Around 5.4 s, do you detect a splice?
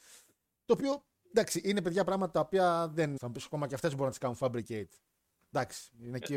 no; 1 cut; at 3.2 s

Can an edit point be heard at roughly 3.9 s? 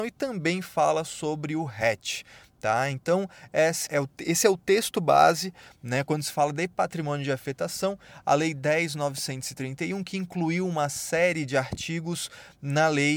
yes; 1 cut; at 3.9 s

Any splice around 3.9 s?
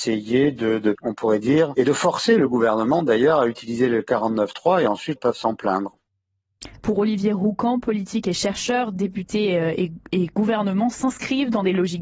no; 3 cuts; at 0.9 s, 5.2 s, 6.8 s

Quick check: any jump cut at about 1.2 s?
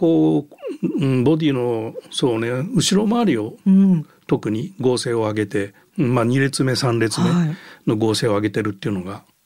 no; 0 cuts

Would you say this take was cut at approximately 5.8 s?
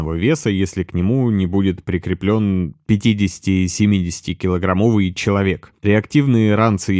yes; 1 cut; at 5.8 s

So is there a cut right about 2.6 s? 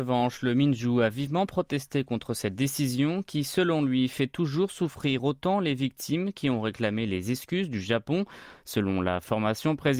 no; 1 cut; at 8.6 s

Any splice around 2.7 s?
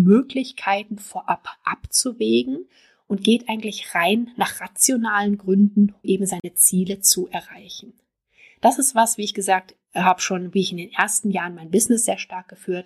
no; 1 cut; at 6.0 s

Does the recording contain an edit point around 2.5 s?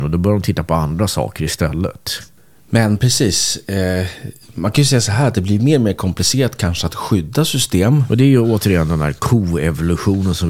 no; 1 cut; at 8.1 s

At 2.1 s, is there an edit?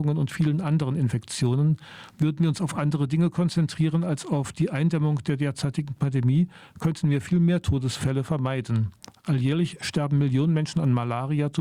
yes; 1 cut; at 2.1 s

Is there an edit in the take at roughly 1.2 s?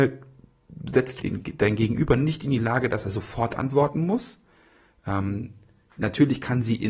yes; 1 cut; at 1.2 s

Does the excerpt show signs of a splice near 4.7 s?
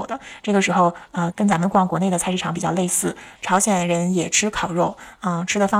no; 2 cuts; at 1.3 s, 3.4 s

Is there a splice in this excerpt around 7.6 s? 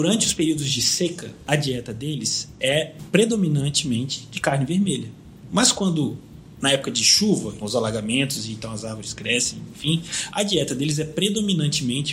yes; 1 cut; at 7.6 s

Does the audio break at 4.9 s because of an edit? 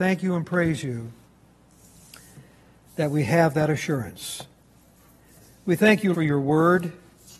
no; 1 cut; at 6.1 s

